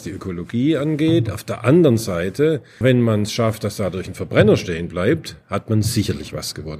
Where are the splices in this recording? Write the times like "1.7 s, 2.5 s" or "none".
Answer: 2.8 s

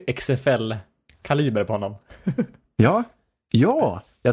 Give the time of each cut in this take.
none

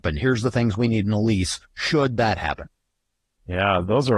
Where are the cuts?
none

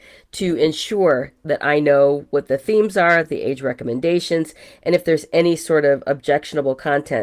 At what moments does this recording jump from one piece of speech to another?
none

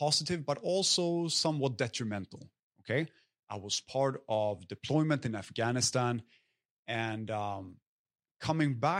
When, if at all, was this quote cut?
none

